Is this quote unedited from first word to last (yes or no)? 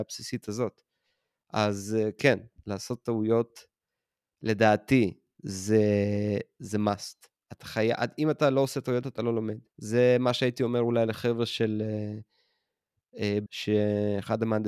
no